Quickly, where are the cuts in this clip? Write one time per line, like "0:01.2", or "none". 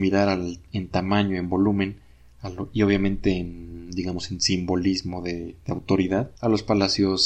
0:06.4

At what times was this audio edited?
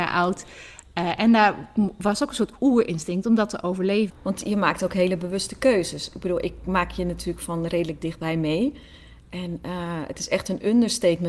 0:04.1

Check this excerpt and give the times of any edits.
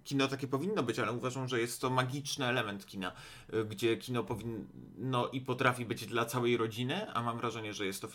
none

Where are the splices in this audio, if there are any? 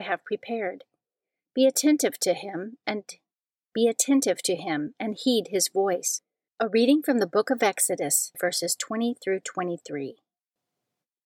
0:06.5
0:08.3

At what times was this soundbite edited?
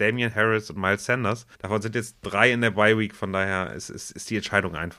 0:01.5

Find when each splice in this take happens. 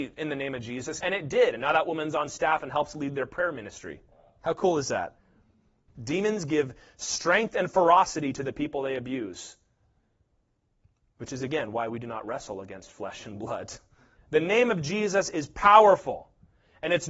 0:01.0
0:14.2

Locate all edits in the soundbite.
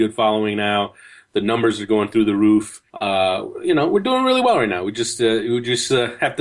0:02.9

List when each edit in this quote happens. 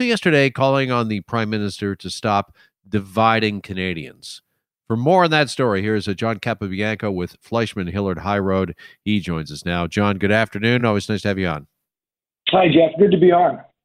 none

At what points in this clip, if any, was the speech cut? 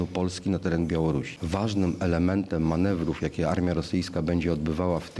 0:01.4

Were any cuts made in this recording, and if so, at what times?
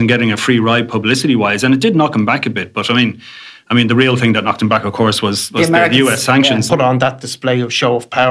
0:06.7

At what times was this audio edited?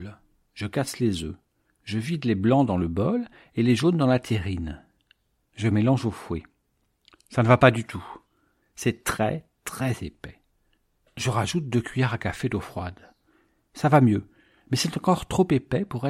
0:05.4

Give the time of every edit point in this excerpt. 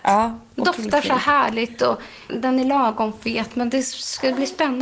0:02.3

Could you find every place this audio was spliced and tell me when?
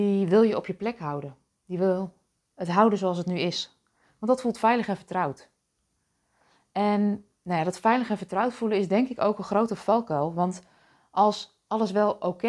none

